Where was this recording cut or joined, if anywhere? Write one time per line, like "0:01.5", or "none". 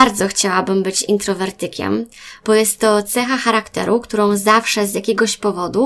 none